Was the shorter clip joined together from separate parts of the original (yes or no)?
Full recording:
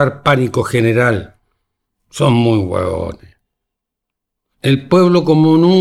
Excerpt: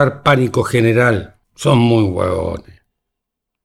yes